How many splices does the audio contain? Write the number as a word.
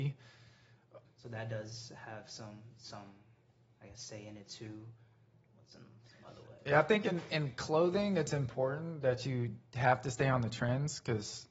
one